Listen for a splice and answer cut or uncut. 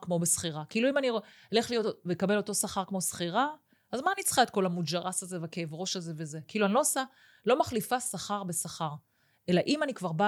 uncut